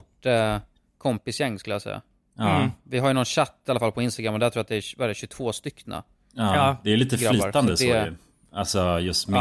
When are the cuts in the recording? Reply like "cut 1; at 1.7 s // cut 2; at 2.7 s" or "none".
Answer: none